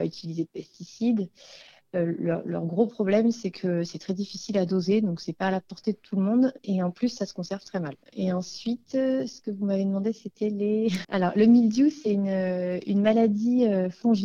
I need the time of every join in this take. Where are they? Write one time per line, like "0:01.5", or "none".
0:11.0